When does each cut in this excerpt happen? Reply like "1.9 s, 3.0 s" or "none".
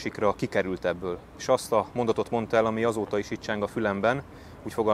1.3 s